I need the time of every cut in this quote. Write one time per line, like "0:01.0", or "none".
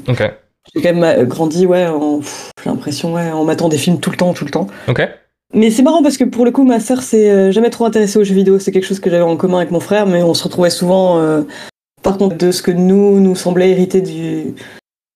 0:05.5
0:12.3